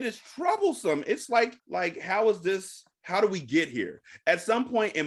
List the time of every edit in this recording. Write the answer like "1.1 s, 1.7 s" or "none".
1.6 s, 2.9 s